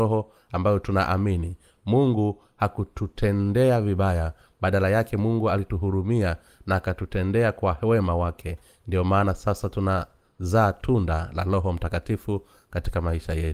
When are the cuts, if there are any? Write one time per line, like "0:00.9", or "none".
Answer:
none